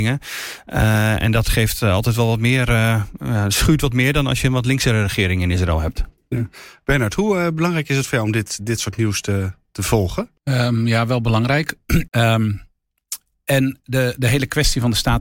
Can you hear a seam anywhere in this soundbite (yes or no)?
yes